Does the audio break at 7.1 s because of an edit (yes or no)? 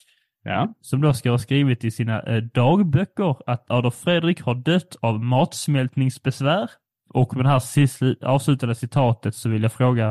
yes